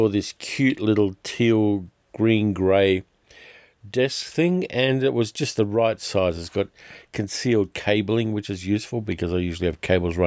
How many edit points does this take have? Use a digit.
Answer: 0